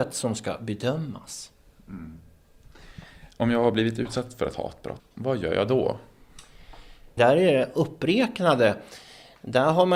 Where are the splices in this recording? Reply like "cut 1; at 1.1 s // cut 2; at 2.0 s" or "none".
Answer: cut 1; at 5.0 s // cut 2; at 7.2 s